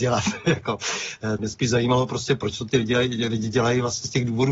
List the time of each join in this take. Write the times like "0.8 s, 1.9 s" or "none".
1.4 s

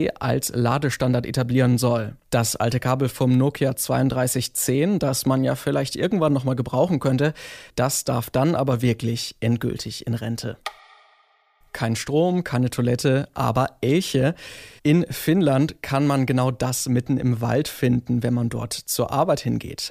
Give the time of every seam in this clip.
14.8 s

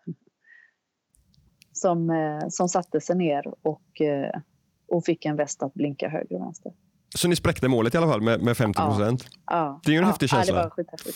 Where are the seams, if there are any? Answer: 8.4 s

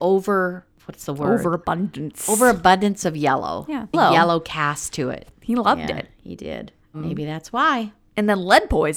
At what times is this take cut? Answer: 3.9 s

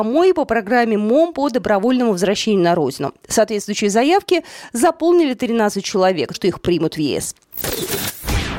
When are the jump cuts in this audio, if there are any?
6.3 s

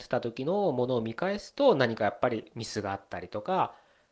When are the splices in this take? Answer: none

